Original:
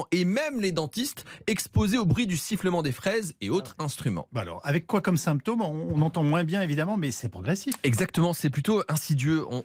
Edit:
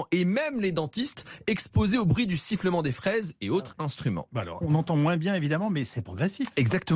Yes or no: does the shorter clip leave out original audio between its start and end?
yes